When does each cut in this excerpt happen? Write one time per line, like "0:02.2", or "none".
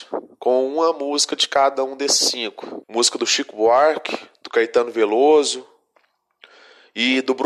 0:02.8

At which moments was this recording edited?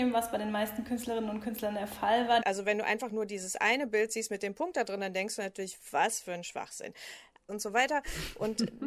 0:02.4
0:07.5

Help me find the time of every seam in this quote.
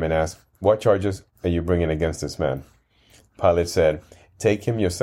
0:03.2

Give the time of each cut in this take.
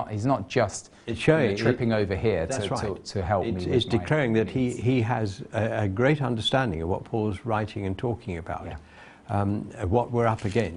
none

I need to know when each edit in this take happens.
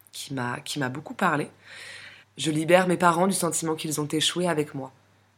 0:02.2

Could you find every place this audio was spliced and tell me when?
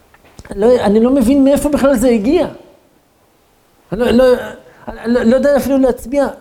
none

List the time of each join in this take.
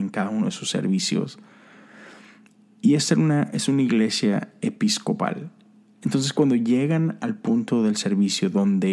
0:05.9

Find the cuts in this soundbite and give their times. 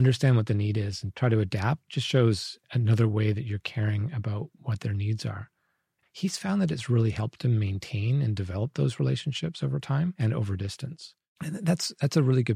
0:06.0
0:11.4

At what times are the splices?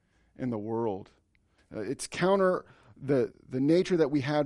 0:01.6
0:03.3

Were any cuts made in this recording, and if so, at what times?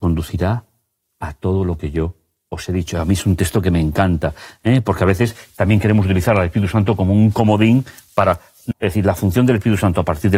0:08.7

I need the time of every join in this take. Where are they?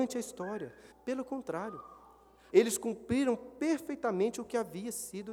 0:00.9
0:02.5

